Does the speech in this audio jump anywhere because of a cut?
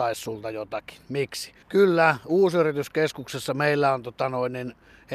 yes; 1 cut; at 1.6 s

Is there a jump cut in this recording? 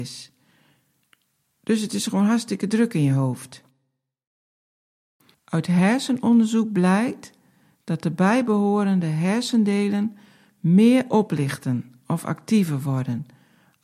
yes; 1 cut; at 5.3 s

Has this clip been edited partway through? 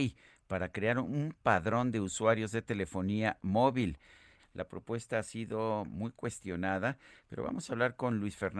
yes; 1 cut; at 4.4 s

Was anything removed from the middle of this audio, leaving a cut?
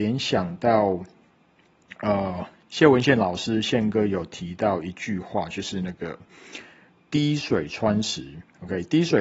no; 0 cuts

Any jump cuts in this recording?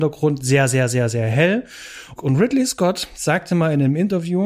yes; 1 cut; at 2.2 s

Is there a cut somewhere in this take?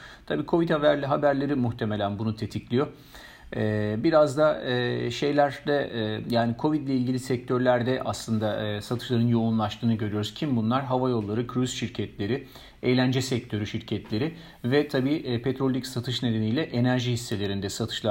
no; 0 cuts

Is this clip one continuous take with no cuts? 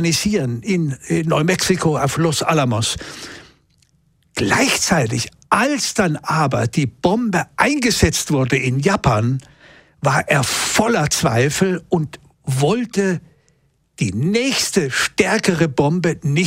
yes; 0 cuts

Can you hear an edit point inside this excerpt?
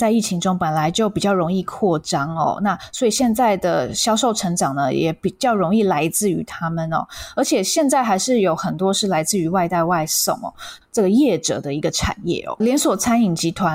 yes; 2 cuts; at 10.8 s, 12.6 s

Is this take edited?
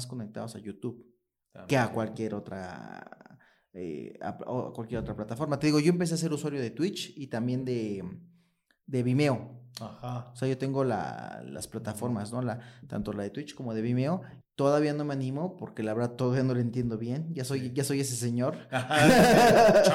yes; 1 cut; at 14.4 s

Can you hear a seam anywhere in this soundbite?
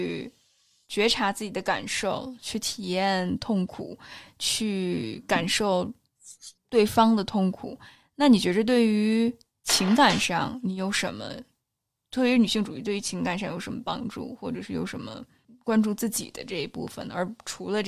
no; 0 cuts

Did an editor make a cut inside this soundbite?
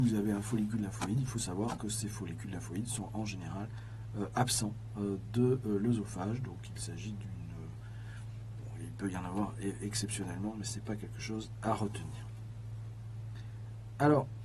no; 0 cuts

